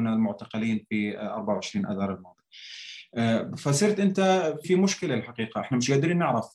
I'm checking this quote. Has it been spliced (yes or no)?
yes